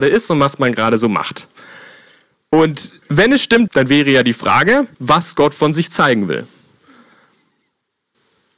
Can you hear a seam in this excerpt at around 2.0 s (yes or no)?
no